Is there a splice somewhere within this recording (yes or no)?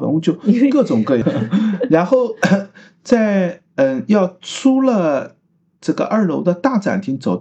yes